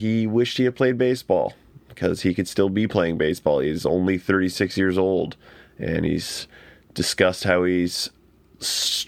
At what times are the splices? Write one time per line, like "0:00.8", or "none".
none